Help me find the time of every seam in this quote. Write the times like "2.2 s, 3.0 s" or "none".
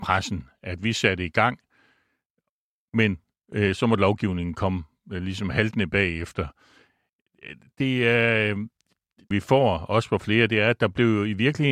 9.3 s